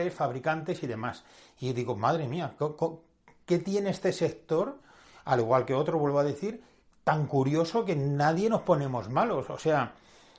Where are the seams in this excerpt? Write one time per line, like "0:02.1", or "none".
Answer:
none